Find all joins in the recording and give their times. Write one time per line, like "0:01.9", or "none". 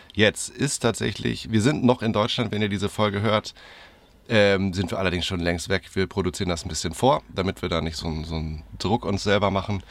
none